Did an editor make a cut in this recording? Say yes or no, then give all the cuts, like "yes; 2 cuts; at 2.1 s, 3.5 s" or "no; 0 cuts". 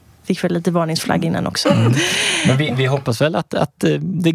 yes; 1 cut; at 1.6 s